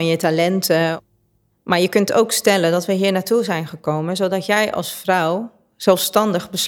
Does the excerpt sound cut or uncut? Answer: uncut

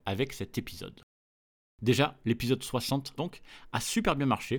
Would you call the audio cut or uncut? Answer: cut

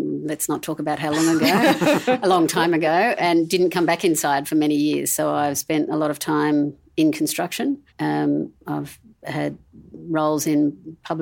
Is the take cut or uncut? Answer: cut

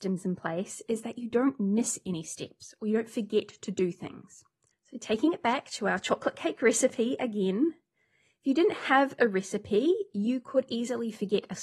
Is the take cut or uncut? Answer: uncut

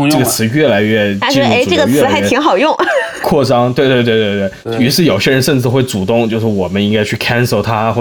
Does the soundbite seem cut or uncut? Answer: uncut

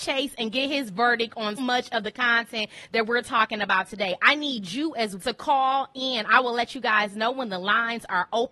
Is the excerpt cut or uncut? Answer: cut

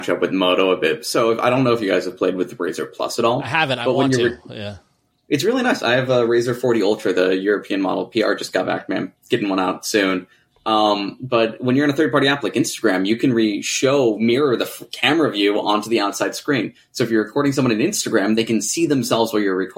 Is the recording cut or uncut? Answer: uncut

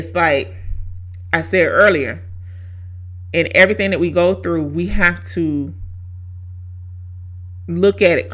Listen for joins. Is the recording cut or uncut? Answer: uncut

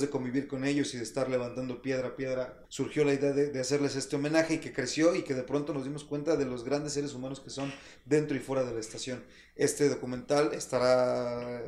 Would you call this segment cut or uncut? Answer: cut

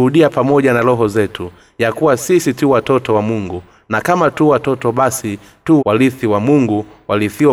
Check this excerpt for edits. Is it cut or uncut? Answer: cut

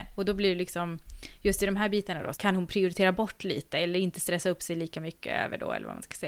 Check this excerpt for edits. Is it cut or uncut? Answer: cut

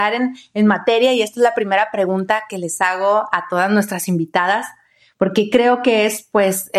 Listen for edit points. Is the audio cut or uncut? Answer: uncut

